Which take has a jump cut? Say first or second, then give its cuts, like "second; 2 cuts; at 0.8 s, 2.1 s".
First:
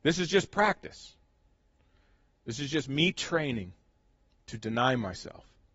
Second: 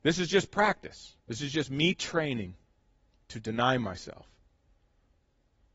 second; 1 cut; at 1.2 s